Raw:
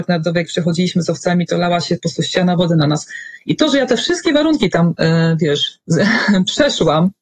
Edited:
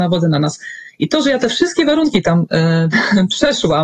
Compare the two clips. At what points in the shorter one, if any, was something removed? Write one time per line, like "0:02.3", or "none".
0:02.9